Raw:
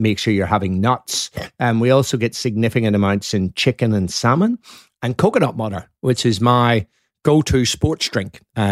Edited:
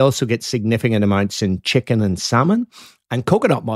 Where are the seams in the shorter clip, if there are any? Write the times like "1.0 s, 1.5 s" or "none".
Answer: none